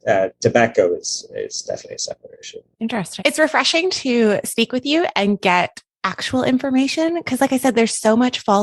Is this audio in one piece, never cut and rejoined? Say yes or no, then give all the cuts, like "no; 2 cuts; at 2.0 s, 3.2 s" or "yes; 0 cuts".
no; 1 cut; at 3.2 s